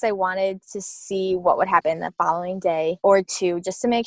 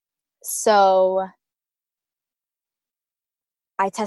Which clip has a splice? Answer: first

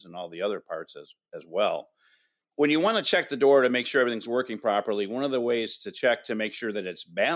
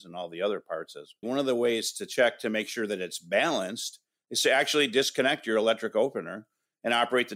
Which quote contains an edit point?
second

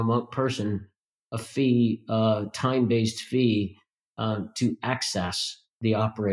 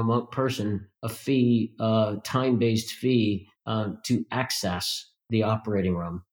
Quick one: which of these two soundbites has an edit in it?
second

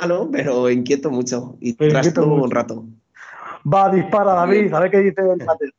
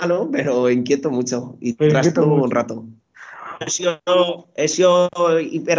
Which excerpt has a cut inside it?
second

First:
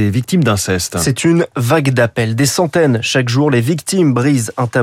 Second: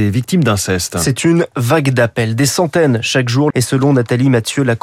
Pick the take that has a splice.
second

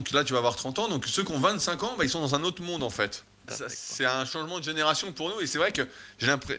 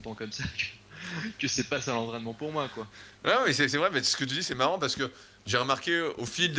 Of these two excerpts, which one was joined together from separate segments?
first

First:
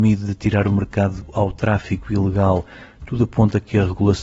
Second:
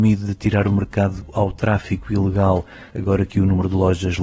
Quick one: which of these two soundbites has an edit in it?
second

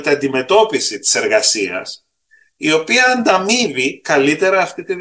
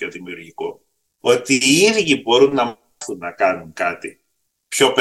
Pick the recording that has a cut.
second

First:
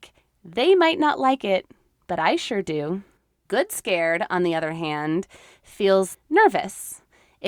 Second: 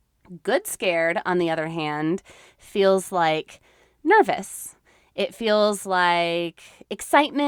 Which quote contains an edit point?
first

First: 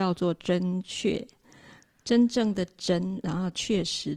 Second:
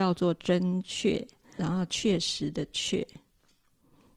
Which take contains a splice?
second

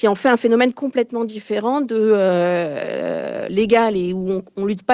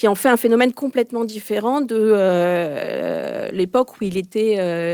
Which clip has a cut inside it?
first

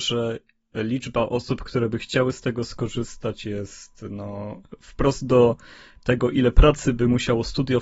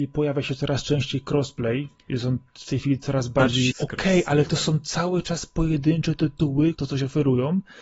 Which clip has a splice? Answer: second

